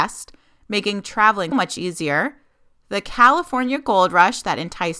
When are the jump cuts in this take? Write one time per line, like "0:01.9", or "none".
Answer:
0:01.5